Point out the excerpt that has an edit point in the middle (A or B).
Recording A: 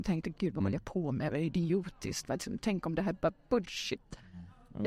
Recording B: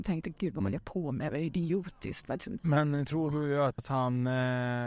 B